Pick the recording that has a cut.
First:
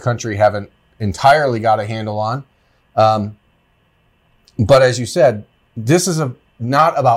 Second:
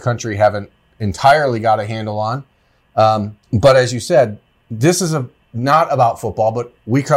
second; 1 cut; at 3.4 s

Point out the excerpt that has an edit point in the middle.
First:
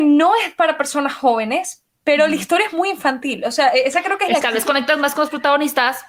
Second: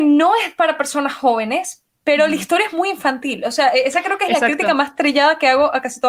first; 1 cut; at 4.4 s

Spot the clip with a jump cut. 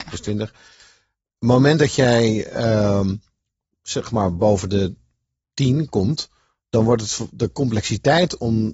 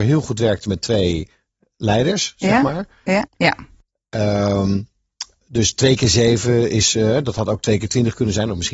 second; 1 cut; at 3.3 s

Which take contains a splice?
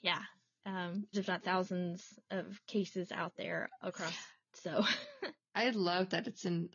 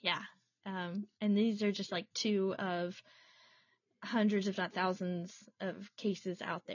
first; 2 cuts; at 1.1 s, 4.5 s

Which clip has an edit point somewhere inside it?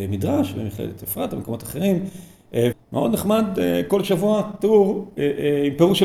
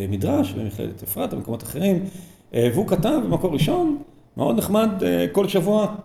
first; 1 cut; at 2.7 s

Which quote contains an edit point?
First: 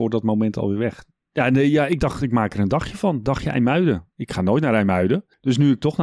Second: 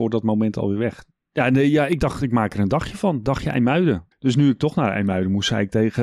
second; 1 cut; at 4.1 s

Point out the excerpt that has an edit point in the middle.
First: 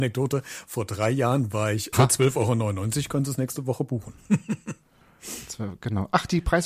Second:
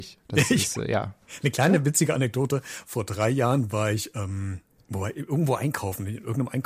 first; 1 cut; at 1.9 s

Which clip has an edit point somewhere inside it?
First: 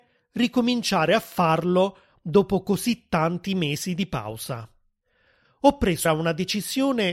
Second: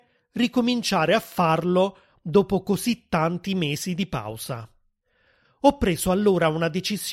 first; 1 cut; at 6.0 s

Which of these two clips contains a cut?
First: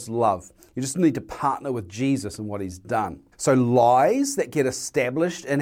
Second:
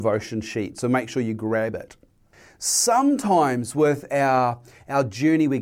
first; 1 cut; at 3.3 s

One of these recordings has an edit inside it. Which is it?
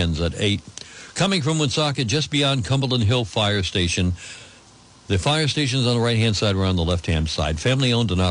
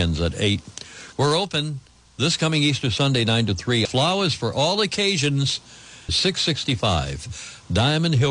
second; 3 cuts; at 1.1 s, 3.9 s, 6.1 s

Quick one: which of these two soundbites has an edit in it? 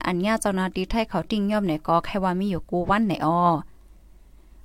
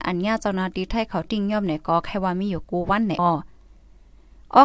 second; 1 cut; at 3.2 s

